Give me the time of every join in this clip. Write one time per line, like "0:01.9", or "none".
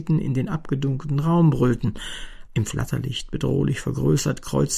0:02.5